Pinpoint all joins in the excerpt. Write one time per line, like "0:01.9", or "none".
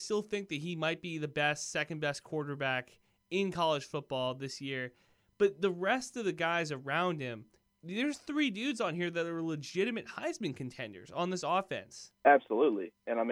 0:12.2